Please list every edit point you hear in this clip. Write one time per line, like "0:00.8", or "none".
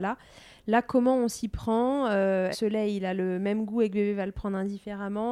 0:02.5